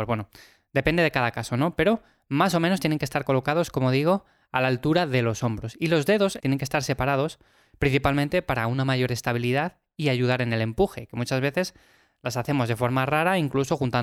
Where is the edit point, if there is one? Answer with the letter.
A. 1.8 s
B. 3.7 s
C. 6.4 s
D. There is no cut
C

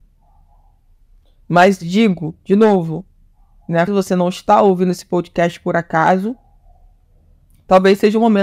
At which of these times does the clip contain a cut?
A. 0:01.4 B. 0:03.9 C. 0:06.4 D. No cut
B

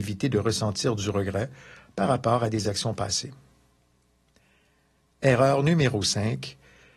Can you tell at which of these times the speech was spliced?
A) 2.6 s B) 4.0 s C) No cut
C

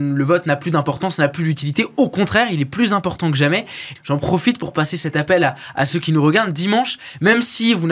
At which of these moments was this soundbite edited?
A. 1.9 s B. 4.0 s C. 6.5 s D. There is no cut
B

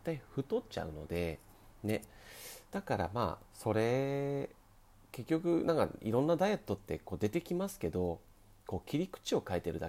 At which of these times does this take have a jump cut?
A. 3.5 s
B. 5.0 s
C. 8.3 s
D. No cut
A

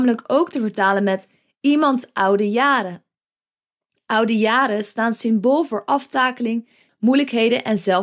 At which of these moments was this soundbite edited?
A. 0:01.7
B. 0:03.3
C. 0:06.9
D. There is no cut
C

